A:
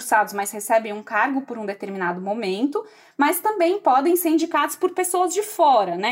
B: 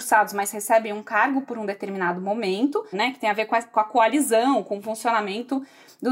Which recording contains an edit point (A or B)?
B